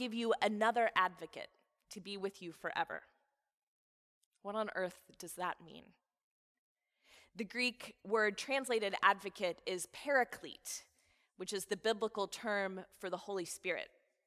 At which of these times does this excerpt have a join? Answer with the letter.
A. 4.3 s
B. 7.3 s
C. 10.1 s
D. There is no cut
A